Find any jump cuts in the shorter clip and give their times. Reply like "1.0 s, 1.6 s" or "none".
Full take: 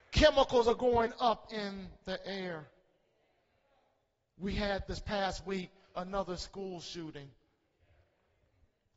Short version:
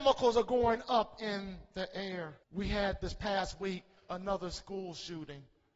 2.4 s

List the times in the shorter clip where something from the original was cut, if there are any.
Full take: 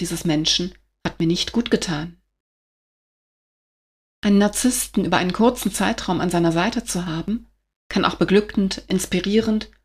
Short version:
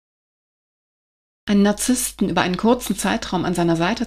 none

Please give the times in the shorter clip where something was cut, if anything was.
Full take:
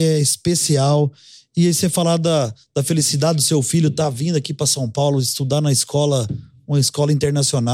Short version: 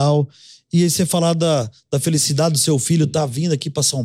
none

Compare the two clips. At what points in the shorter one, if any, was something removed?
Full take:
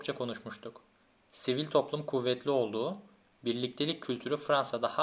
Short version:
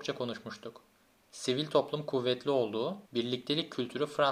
3.0 s

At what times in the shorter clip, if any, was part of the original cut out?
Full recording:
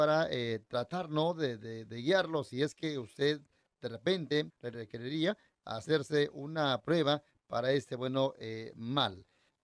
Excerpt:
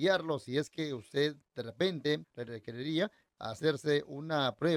1.4 s

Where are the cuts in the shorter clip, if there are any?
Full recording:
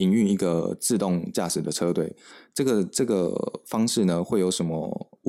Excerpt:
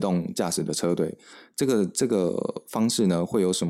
none

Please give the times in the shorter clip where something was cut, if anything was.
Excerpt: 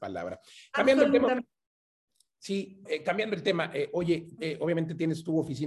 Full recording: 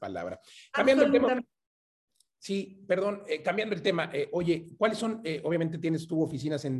2.9 s, 4.4 s

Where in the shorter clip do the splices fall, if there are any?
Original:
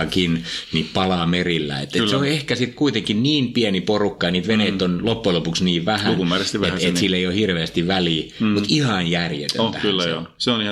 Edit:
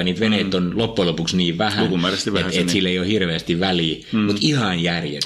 none

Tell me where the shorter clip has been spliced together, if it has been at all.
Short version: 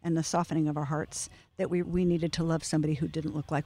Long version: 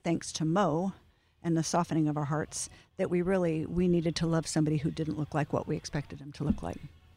1.8 s

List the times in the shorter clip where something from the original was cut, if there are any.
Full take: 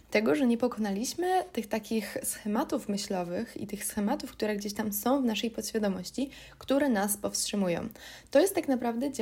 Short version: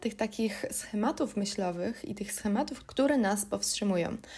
2.8 s

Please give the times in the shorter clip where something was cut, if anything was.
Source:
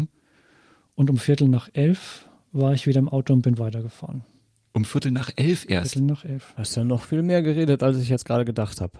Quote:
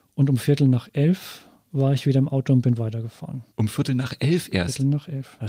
3.5 s

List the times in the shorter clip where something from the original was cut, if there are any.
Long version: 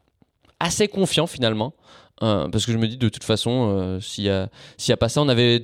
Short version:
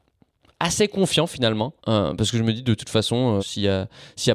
1.8 s, 3.4 s

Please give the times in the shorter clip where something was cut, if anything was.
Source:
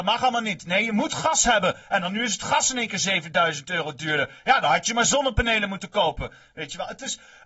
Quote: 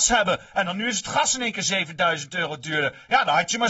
none

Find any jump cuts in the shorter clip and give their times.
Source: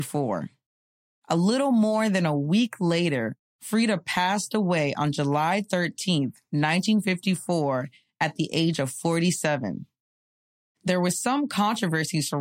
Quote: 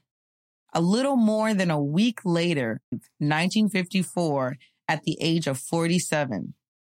2.9 s

